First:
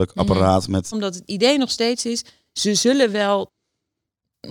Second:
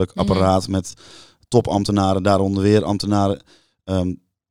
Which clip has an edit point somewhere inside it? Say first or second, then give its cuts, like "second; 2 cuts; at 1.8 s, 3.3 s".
first; 1 cut; at 0.9 s